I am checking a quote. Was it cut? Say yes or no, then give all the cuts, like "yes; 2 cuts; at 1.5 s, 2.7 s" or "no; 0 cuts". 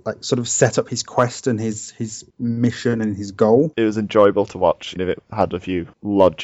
yes; 2 cuts; at 3.7 s, 5.0 s